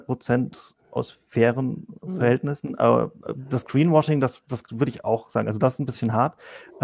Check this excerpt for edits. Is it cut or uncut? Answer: uncut